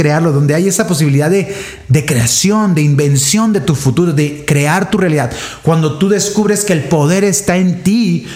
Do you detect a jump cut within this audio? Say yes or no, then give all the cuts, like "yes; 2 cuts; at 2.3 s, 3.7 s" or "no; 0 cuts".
no; 0 cuts